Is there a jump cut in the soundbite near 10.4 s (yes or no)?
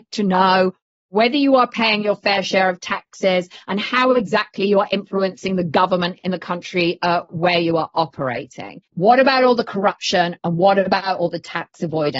no